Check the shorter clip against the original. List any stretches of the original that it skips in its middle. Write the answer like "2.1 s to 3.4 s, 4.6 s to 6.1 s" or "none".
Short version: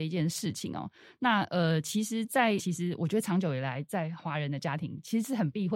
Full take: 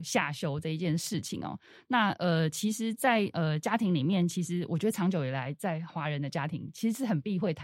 3.3 s to 4.3 s